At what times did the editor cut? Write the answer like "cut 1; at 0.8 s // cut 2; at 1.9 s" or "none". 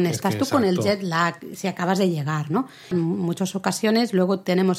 cut 1; at 2.9 s